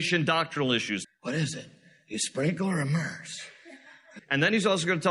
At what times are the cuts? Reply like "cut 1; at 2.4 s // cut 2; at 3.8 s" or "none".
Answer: cut 1; at 1.0 s // cut 2; at 4.2 s